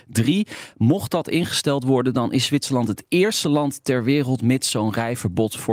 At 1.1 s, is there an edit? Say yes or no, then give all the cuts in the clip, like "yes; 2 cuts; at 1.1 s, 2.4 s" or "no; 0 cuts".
no; 0 cuts